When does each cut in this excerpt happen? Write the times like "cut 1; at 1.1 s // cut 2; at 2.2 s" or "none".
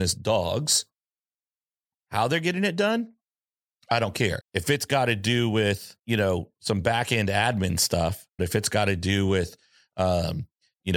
cut 1; at 4.4 s // cut 2; at 6.0 s // cut 3; at 8.4 s

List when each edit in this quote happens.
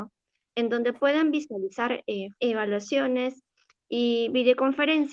cut 1; at 2.3 s

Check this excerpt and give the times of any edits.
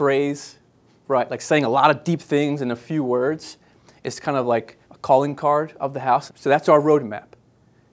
cut 1; at 4.8 s // cut 2; at 6.3 s

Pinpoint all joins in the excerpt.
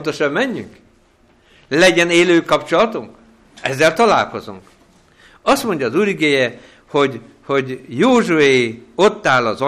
none

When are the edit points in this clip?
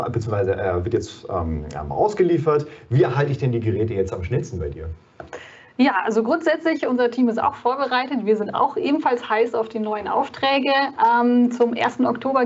none

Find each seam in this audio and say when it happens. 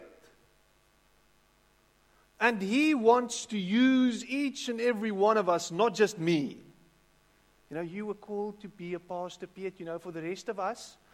none

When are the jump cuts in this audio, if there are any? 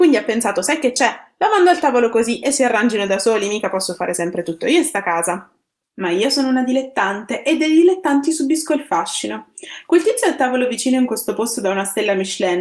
none

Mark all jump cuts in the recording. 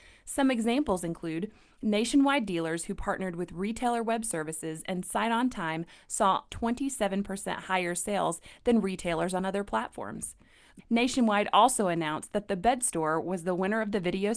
cut 1; at 6.5 s // cut 2; at 10.8 s

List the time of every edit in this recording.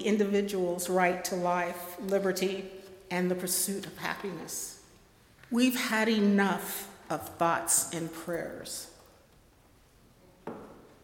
cut 1; at 5.4 s

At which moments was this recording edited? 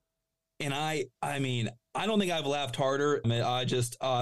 cut 1; at 1.1 s // cut 2; at 3.2 s

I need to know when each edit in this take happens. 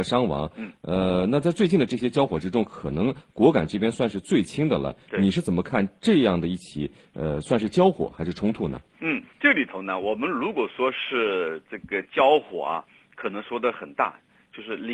cut 1; at 9.3 s

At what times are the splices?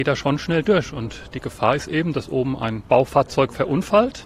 cut 1; at 2.9 s

